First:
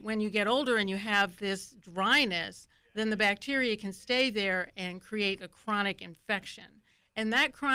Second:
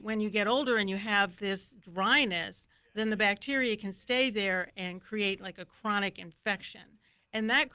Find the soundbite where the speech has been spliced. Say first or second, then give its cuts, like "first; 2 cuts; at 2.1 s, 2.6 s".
first; 1 cut; at 5.4 s